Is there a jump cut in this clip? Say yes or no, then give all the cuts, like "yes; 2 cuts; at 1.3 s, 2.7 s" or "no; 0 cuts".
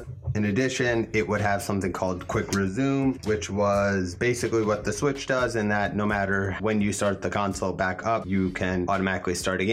no; 0 cuts